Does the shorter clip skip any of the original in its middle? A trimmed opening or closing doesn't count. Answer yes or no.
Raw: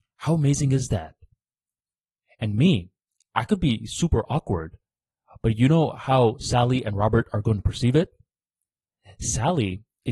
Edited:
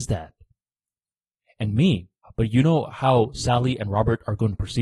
yes